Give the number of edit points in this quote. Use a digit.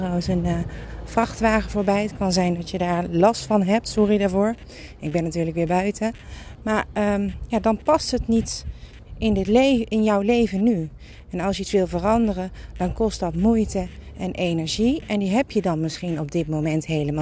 0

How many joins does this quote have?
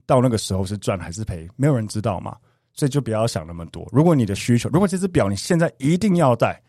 0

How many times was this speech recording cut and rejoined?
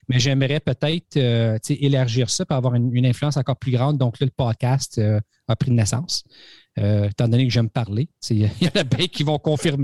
0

